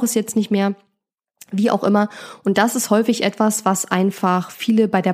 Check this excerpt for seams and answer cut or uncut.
uncut